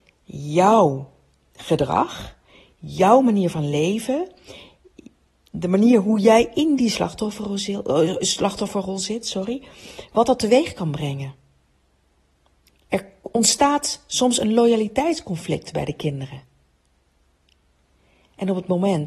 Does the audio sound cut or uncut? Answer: uncut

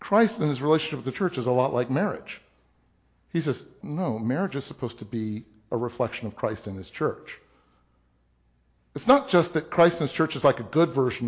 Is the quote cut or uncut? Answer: cut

